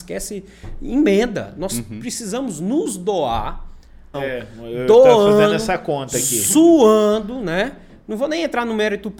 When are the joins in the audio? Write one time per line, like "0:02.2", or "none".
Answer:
0:04.1